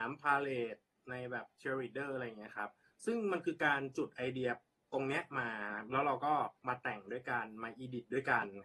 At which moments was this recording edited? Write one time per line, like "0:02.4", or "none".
0:06.6